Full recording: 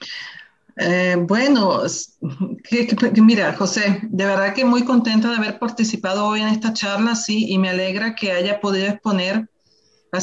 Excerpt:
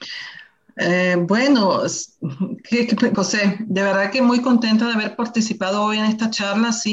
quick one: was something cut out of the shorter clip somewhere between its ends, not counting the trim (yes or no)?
yes